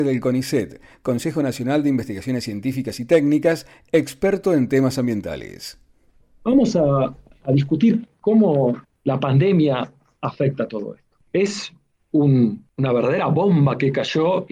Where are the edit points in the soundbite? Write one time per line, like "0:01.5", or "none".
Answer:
0:11.2